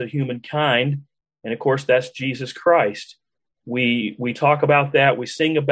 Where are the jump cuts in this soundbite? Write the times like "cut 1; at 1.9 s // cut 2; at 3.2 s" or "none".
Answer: none